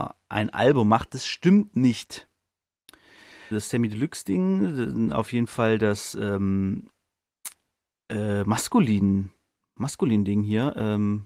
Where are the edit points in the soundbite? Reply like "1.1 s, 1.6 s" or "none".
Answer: 3.5 s